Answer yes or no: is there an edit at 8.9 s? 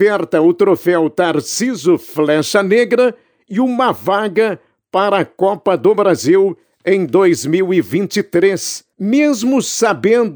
yes